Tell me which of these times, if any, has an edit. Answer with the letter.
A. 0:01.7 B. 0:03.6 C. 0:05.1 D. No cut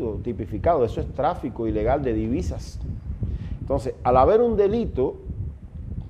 B